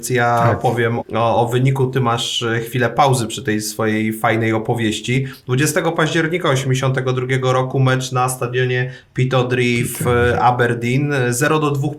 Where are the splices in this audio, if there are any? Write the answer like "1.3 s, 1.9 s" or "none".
1.0 s